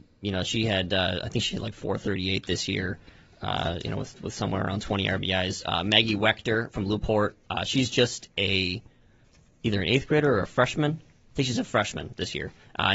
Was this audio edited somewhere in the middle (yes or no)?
no